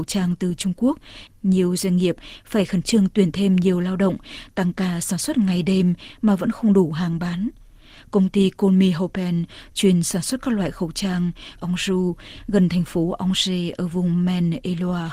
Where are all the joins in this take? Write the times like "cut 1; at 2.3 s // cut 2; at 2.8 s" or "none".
cut 1; at 1.3 s // cut 2; at 11.6 s

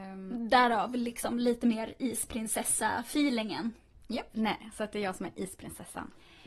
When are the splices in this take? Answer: cut 1; at 4.3 s

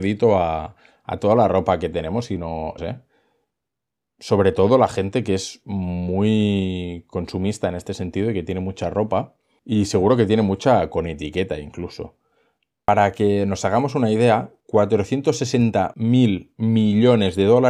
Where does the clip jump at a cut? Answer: cut 1; at 2.8 s // cut 2; at 12.8 s

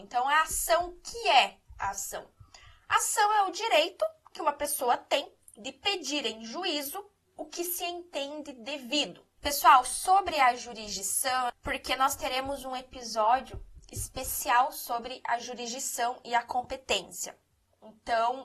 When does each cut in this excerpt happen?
cut 1; at 9.4 s // cut 2; at 11.5 s

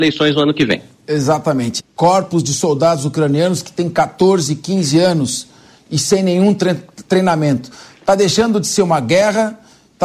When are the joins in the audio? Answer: cut 1; at 1.8 s

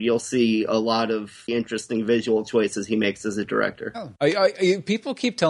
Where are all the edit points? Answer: cut 1; at 1.5 s

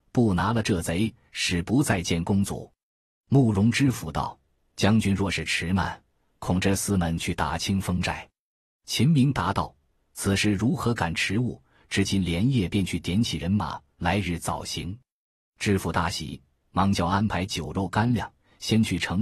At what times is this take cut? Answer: none

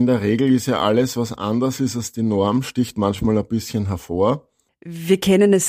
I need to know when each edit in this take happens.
cut 1; at 4.7 s

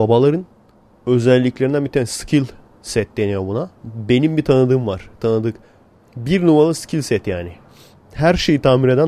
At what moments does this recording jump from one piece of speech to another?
cut 1; at 3.8 s

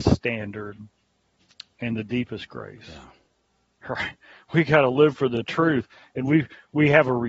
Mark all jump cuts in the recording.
none

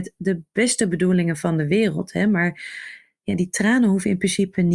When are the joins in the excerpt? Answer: none

